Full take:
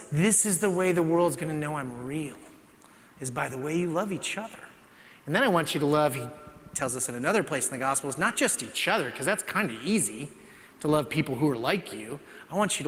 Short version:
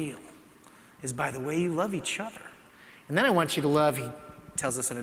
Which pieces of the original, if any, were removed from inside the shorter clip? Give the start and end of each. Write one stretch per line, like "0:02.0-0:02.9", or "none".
none